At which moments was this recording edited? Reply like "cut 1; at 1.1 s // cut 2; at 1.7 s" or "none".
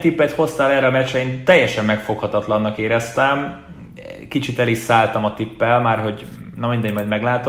none